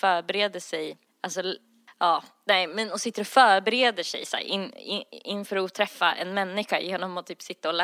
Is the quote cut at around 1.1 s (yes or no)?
yes